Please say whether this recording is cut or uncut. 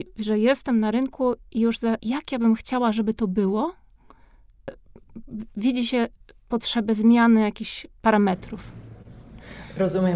cut